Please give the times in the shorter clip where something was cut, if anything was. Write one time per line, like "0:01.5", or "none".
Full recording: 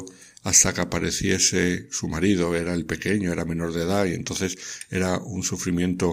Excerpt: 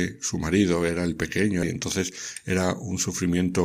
0:01.6